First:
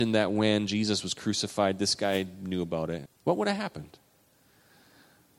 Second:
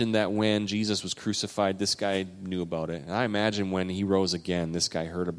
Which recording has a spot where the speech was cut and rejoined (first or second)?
first